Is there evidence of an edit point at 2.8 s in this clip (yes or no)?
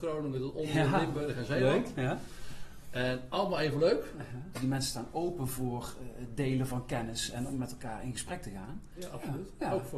no